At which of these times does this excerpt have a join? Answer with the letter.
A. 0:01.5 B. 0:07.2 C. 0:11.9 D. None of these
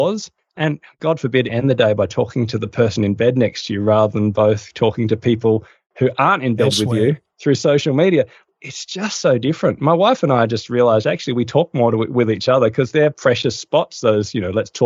A